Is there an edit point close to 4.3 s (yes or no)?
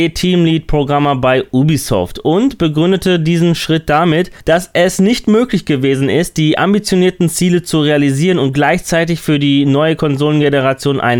no